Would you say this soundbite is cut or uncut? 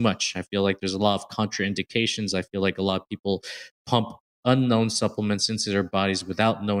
uncut